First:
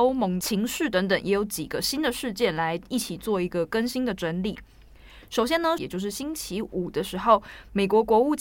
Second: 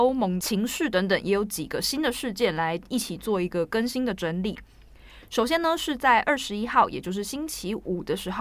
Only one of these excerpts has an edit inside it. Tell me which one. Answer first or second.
first